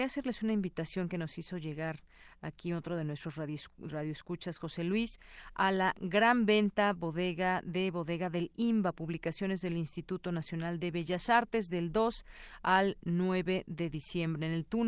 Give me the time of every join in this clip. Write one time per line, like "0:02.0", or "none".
none